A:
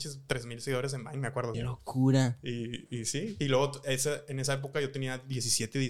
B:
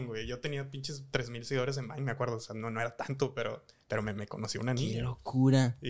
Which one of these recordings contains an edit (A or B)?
A